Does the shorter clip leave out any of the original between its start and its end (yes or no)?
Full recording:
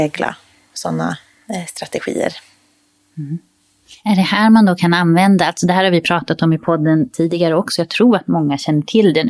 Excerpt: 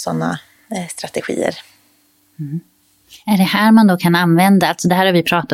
no